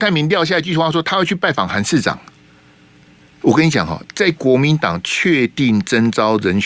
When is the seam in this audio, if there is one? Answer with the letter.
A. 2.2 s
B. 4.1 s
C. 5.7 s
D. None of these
D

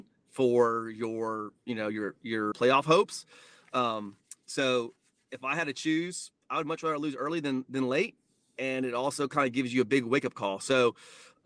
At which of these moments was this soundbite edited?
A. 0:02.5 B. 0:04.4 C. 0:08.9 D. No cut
A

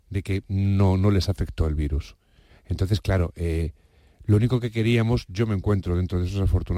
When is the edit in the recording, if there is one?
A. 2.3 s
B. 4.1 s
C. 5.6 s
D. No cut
D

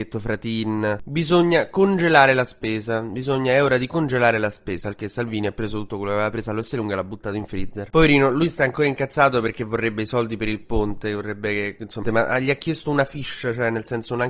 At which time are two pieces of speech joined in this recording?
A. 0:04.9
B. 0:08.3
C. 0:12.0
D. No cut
C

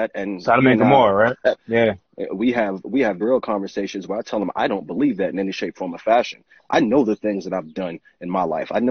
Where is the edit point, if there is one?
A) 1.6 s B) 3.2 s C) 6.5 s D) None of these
B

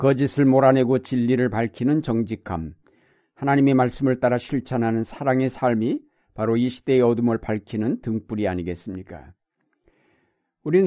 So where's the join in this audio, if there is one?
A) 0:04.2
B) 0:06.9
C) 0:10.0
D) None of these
D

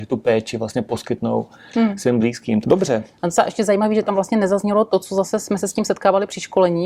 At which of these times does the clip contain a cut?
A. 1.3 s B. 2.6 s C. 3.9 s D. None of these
B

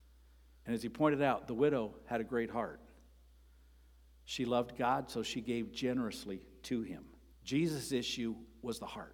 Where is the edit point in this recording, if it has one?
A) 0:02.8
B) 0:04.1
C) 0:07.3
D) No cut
C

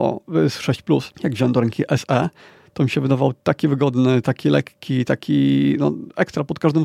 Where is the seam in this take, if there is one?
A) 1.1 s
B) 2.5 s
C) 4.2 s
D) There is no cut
A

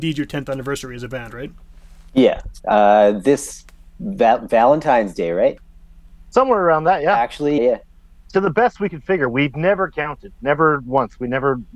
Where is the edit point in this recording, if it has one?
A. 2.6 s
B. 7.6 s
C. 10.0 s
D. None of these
B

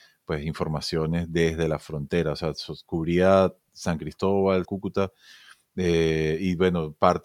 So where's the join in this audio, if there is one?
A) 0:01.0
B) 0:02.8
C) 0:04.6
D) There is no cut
C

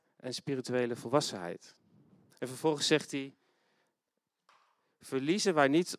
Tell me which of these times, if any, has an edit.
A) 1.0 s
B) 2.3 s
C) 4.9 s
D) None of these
B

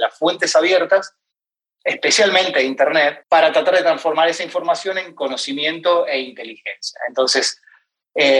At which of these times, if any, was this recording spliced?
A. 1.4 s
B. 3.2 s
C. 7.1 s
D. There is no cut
B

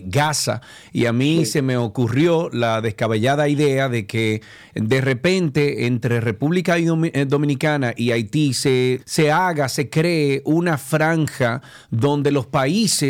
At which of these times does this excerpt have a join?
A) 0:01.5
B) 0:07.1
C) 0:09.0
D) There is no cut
C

